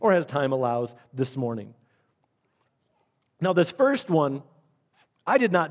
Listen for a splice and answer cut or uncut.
uncut